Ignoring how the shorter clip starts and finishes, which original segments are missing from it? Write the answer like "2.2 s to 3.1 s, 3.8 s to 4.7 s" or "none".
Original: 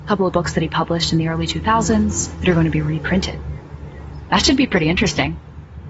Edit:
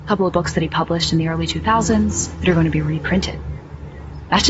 none

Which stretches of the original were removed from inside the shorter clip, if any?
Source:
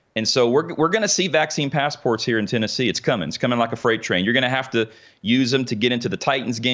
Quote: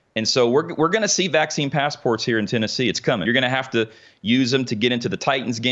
3.3 s to 4.3 s

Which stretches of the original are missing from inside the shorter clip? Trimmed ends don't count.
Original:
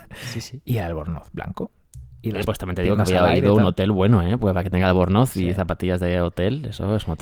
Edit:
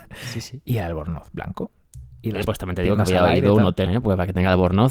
3.9 s to 4.2 s

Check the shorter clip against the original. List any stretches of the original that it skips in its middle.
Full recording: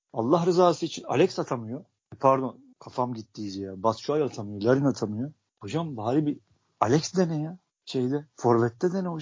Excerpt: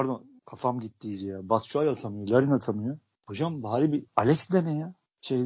6.4 s to 6.7 s

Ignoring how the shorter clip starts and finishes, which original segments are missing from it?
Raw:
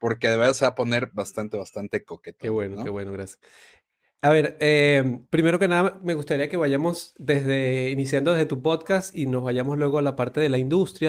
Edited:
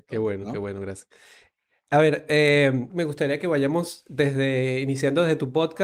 5.2 s to 6.0 s

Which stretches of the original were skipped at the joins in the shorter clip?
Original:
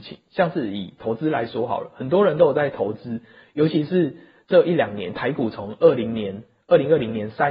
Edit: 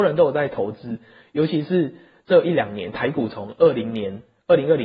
none

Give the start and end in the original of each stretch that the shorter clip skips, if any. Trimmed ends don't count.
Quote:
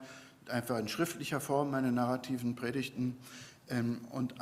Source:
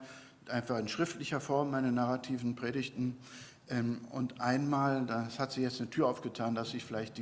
none

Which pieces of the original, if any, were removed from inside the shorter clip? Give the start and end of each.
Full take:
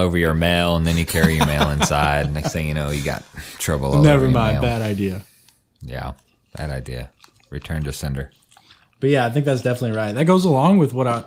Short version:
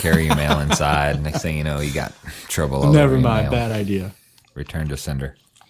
5.5 s to 7.4 s

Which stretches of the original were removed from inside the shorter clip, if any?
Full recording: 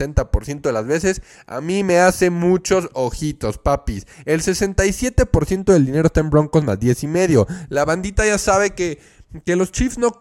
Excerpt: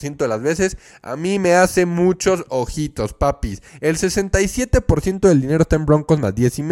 none

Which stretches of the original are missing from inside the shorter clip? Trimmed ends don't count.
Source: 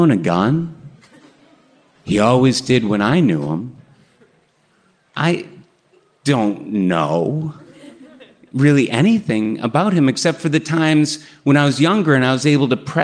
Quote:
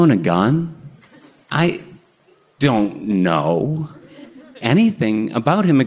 1.4 s to 5.1 s, 8.3 s to 8.9 s

